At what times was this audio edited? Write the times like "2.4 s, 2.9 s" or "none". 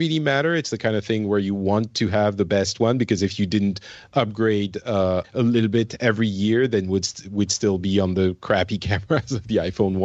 5.2 s